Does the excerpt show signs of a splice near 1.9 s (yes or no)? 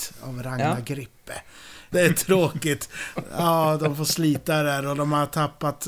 yes